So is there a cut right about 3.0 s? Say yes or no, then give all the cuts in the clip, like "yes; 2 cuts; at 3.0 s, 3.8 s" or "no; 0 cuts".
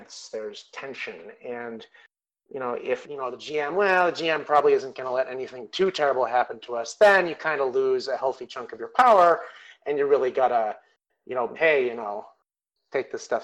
yes; 2 cuts; at 3.0 s, 11.5 s